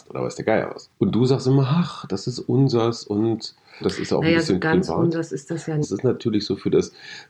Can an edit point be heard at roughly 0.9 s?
no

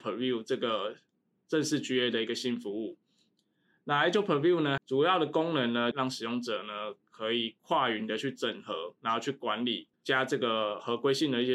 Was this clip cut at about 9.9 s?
yes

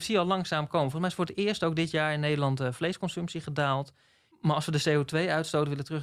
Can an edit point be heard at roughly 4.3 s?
yes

